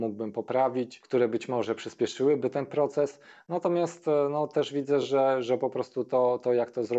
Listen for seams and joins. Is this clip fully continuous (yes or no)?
yes